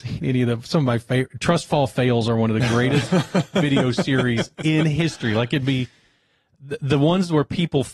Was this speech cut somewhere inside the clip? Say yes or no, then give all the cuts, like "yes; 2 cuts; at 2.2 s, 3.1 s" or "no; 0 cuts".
no; 0 cuts